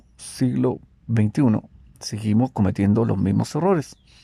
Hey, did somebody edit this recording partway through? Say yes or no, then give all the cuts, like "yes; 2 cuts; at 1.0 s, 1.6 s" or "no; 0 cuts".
no; 0 cuts